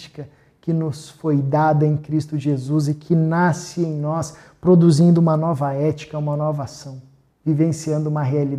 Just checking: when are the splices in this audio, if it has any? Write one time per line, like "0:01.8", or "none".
0:07.3